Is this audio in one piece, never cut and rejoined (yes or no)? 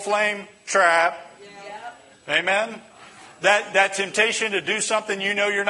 yes